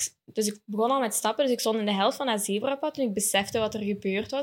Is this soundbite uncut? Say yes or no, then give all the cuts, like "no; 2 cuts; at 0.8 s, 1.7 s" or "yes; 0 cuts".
yes; 0 cuts